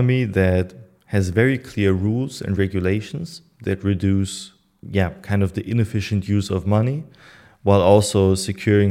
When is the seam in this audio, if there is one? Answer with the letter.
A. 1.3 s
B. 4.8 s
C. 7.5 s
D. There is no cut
B